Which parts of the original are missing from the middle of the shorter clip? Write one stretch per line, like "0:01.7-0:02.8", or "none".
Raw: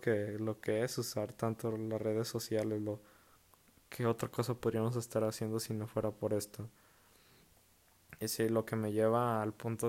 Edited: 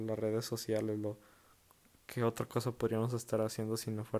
none